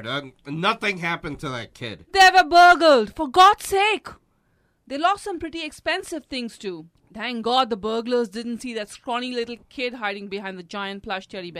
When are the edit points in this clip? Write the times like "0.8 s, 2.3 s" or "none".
none